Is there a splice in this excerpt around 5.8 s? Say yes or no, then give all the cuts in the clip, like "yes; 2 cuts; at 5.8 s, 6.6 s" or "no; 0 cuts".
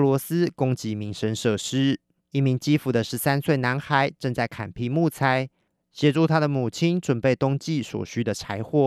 no; 1 cut; at 2.2 s